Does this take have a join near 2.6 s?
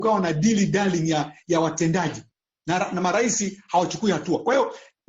no; 0 cuts

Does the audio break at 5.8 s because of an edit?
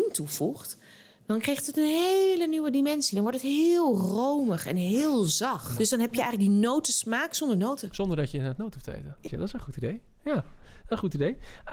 yes; 2 cuts; at 5.8 s, 9.3 s

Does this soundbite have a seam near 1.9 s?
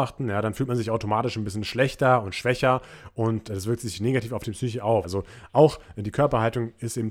no; 1 cut; at 5.0 s

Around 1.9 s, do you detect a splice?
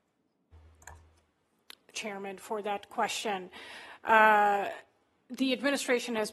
yes; 1 cut; at 1.9 s

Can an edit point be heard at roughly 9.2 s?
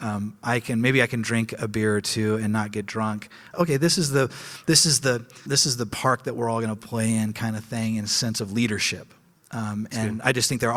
no; 2 cuts; at 3.5 s, 5.5 s

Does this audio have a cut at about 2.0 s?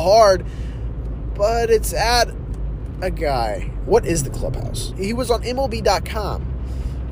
no; 2 cuts; at 3.9 s, 4.9 s

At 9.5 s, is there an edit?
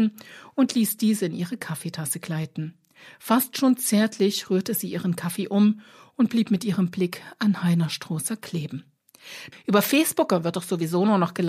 yes; 1 cut; at 9.5 s

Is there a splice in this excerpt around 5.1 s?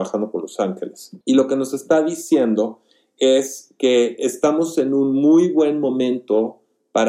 no; 1 cut; at 1.2 s

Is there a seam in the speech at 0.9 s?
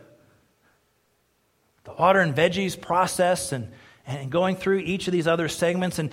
no; 0 cuts

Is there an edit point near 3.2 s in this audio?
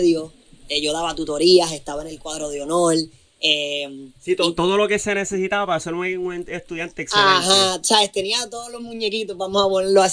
no; 0 cuts

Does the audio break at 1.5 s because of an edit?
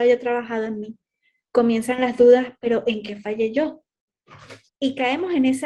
no; 1 cut; at 4.7 s

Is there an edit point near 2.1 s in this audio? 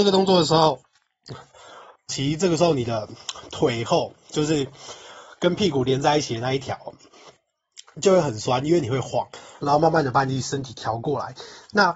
yes; 2 cuts; at 2.1 s, 9.6 s

